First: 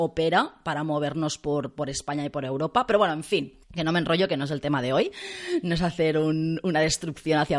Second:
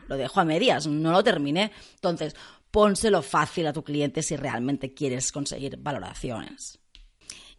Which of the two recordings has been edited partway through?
first; 1 cut; at 3.6 s

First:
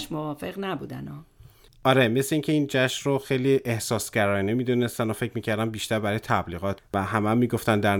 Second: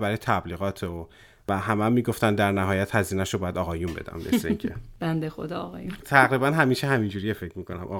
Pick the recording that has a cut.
first; 1 cut; at 6.8 s

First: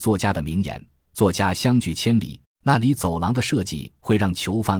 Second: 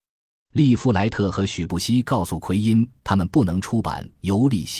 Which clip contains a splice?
first; 1 cut; at 2.4 s

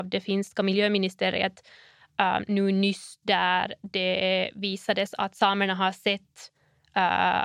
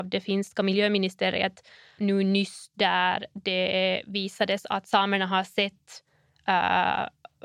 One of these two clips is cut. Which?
second; 1 cut; at 2.0 s

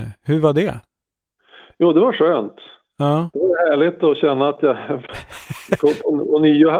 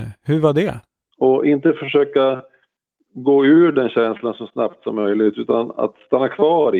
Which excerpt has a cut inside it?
second; 1 cut; at 1.1 s

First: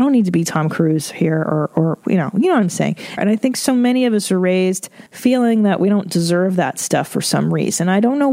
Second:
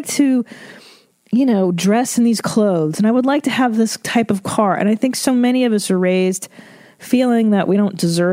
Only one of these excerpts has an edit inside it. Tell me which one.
first; 2 cuts; at 3.2 s, 5.1 s

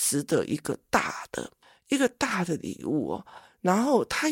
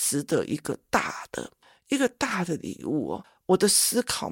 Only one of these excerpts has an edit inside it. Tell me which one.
second; 1 cut; at 3.2 s

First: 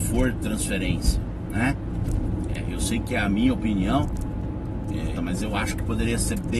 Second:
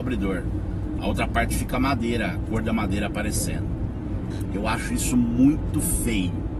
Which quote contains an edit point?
first; 2 cuts; at 2.5 s, 5.2 s

